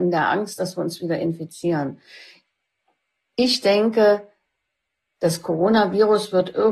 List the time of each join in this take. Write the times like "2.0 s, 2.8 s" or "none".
none